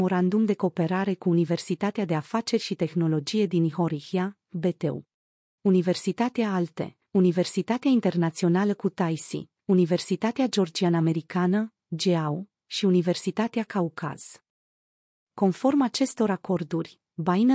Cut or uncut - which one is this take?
cut